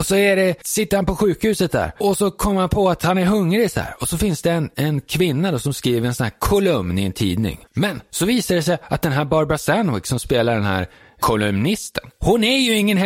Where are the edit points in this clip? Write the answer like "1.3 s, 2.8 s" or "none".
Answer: 7.6 s